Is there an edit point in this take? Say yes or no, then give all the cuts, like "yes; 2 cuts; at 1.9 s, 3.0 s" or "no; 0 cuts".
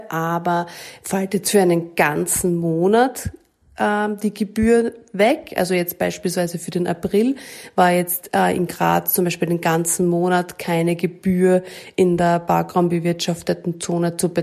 no; 0 cuts